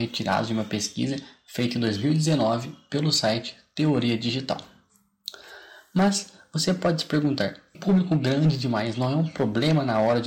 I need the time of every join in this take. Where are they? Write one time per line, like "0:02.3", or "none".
0:07.7